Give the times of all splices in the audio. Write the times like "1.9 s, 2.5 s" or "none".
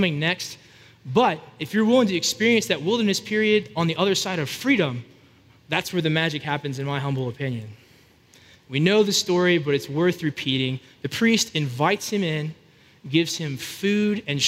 8.5 s